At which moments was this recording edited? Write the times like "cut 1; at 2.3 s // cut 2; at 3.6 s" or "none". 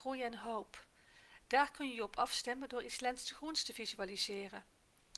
none